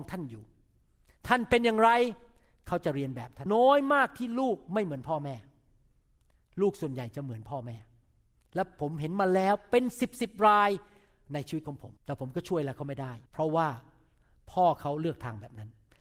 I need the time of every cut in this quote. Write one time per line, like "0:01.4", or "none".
0:03.5
0:12.0
0:13.3